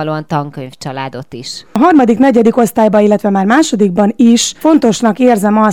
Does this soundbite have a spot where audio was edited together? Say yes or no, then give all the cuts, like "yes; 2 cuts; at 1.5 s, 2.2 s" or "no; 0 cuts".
no; 0 cuts